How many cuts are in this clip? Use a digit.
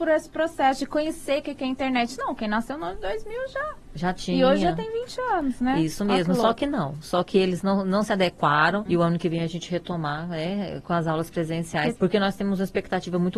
2